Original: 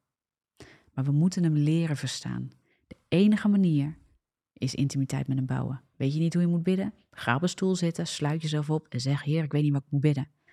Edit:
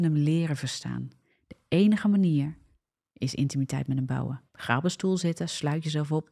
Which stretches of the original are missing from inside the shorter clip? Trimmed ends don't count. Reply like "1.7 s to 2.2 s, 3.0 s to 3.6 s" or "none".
5.9 s to 7.1 s